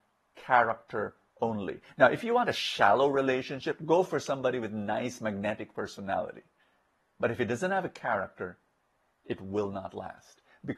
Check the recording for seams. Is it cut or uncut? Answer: uncut